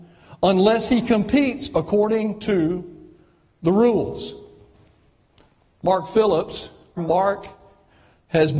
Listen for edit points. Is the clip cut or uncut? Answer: cut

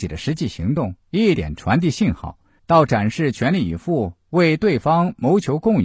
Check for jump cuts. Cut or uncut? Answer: cut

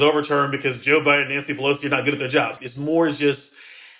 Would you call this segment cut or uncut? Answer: cut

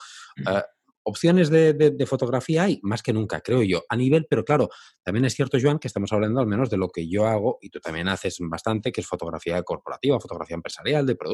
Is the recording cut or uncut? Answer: uncut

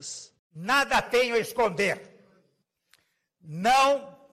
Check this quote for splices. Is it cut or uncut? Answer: uncut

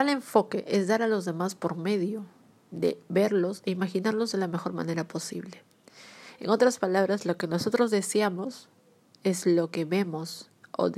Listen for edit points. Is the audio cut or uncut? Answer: uncut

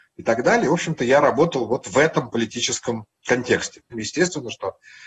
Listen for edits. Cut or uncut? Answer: cut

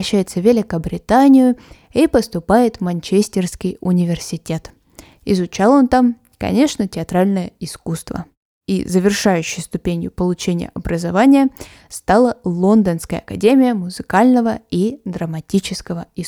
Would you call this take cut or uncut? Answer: uncut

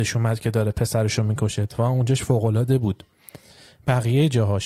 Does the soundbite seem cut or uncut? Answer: uncut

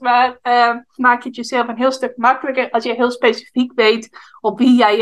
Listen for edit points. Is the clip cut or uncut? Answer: cut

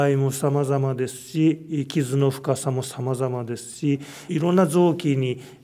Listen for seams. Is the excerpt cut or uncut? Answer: cut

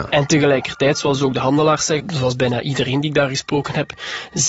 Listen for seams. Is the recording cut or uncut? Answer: cut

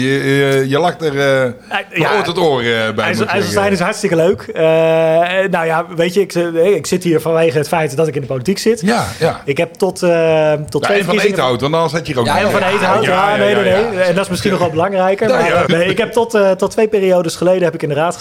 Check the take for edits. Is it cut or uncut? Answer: cut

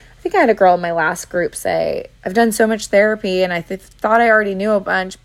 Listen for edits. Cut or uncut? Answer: cut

